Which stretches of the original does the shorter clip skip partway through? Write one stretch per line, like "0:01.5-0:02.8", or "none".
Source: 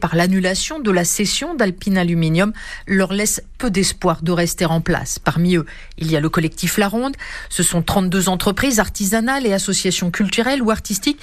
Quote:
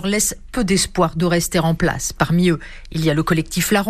none